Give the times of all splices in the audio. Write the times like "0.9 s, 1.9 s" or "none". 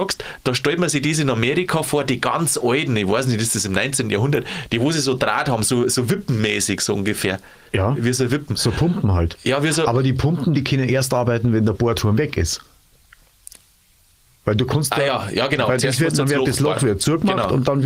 none